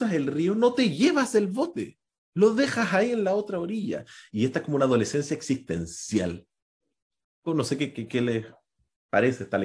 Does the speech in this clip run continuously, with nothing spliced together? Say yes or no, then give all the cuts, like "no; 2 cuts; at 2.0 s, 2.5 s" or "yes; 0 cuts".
no; 2 cuts; at 4.3 s, 7.5 s